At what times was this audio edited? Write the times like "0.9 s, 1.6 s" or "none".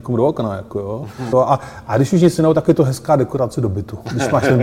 1.3 s